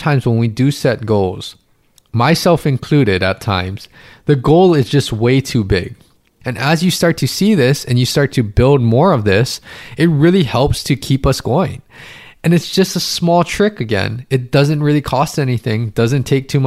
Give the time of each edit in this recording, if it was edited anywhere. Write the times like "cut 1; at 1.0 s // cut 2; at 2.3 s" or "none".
cut 1; at 6.4 s